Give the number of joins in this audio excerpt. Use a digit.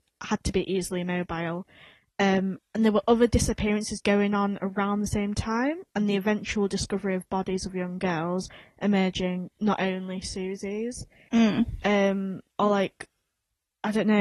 1